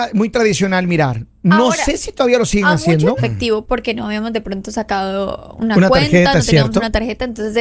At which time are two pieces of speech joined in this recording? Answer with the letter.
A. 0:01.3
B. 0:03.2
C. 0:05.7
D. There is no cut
B